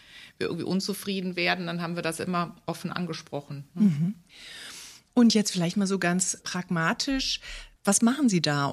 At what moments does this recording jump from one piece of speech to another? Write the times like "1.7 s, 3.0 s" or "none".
7.8 s